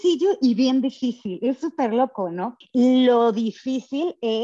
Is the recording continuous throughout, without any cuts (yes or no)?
no